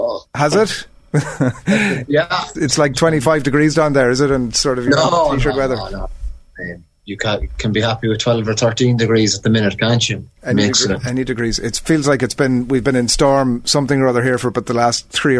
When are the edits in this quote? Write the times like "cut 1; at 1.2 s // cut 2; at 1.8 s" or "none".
cut 1; at 2.5 s